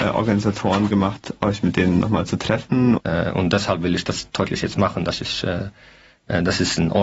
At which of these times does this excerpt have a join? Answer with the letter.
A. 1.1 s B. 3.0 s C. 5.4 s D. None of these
B